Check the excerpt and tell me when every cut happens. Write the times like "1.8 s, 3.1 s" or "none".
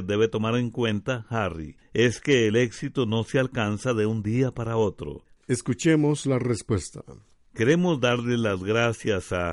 5.4 s